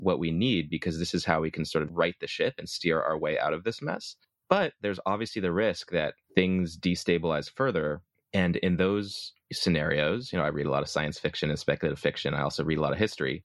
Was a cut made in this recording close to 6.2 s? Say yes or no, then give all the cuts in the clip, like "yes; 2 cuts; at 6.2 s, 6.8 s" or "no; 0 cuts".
yes; 1 cut; at 6.2 s